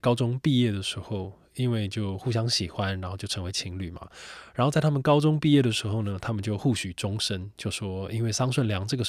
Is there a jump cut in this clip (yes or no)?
no